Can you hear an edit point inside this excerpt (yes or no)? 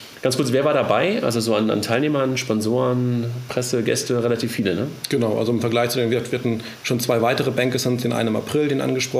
no